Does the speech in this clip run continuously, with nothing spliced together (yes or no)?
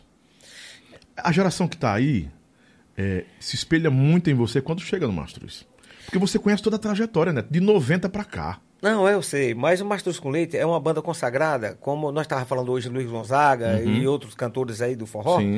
yes